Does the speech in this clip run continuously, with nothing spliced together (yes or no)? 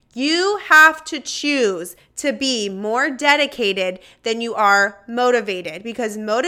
yes